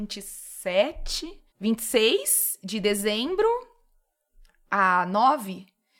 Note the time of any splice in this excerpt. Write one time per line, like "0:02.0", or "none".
0:01.5

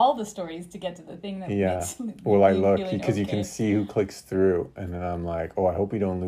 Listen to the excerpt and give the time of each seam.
none

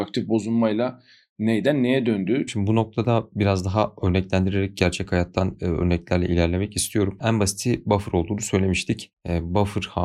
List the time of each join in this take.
0:02.5

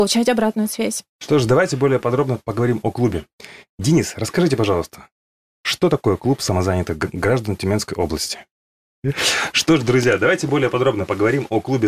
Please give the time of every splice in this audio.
0:01.1

